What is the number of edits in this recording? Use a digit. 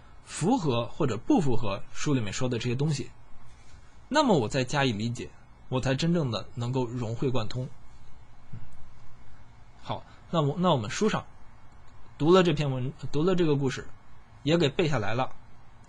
1